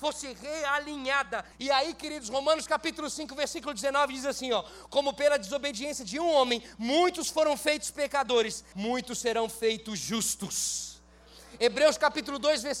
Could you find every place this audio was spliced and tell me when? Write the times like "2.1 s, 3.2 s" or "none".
1.5 s, 8.7 s